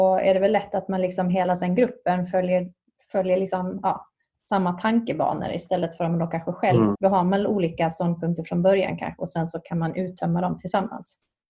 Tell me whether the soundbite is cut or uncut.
cut